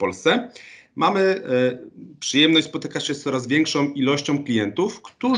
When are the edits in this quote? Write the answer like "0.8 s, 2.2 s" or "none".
none